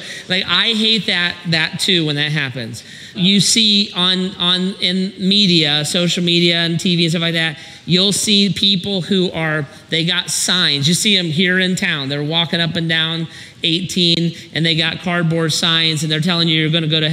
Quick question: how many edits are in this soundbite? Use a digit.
1